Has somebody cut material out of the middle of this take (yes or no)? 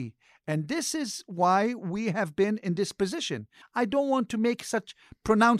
yes